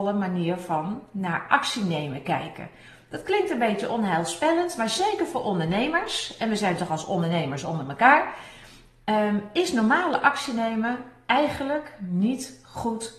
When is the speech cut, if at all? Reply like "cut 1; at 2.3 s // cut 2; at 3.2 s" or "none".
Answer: none